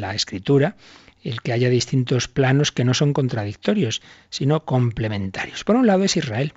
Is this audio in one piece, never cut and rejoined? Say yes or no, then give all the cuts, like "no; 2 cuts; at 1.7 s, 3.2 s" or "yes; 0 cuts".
yes; 0 cuts